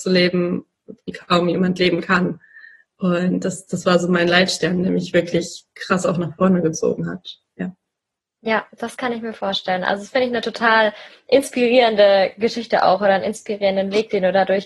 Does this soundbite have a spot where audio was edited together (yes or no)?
no